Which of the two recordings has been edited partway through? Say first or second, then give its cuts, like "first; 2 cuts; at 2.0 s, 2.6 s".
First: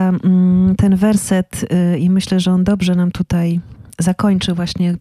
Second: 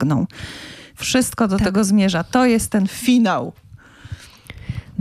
second; 1 cut; at 1.0 s